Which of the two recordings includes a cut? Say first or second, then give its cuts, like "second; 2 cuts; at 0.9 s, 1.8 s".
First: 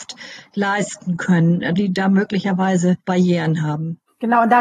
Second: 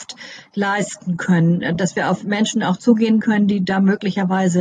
first; 2 cuts; at 1.8 s, 3.0 s